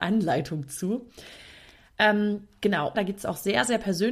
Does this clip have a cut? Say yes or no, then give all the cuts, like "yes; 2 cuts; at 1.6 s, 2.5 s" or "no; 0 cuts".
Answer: yes; 1 cut; at 2.9 s